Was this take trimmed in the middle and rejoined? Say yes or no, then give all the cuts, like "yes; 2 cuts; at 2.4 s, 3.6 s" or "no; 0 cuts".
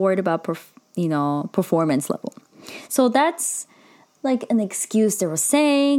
no; 0 cuts